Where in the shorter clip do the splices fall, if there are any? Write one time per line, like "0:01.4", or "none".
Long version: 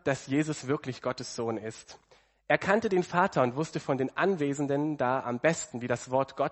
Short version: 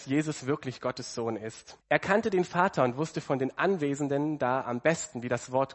0:01.8